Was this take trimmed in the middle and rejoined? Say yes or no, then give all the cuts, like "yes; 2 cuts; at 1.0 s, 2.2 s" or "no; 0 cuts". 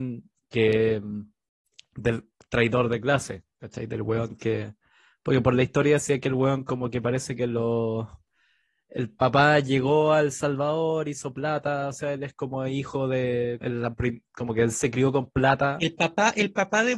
yes; 1 cut; at 13.6 s